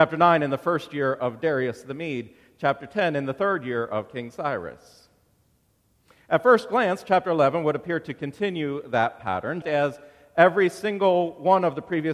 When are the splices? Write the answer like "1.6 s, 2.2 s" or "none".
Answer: 9.6 s